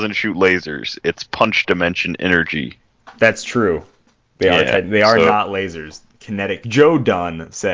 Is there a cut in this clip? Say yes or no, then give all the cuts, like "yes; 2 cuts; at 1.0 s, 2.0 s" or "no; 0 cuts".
yes; 2 cuts; at 3.2 s, 6.6 s